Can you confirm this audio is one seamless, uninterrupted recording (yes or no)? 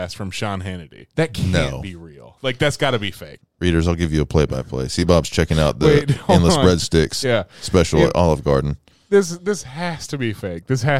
no